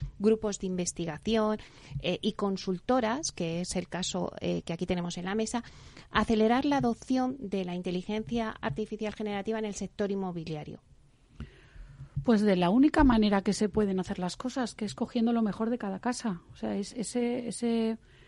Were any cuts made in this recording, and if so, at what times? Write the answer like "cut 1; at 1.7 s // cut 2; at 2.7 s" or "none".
none